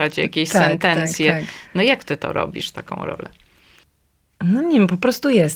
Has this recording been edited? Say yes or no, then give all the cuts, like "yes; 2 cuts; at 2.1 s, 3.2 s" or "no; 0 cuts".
no; 0 cuts